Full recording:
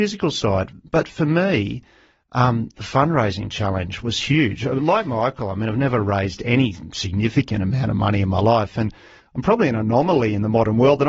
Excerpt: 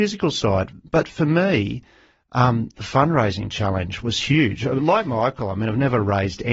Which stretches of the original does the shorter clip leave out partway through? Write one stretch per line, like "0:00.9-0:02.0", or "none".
none